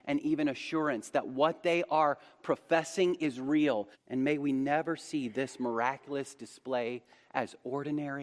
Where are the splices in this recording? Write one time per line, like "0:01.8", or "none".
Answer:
0:03.9